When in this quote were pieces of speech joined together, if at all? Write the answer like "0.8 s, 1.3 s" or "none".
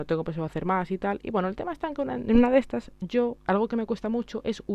none